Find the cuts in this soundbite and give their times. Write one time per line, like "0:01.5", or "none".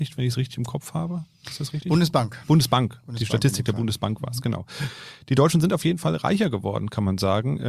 none